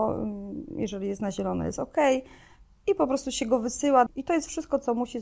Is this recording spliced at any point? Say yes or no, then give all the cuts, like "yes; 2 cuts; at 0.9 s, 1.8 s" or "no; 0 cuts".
yes; 1 cut; at 4.1 s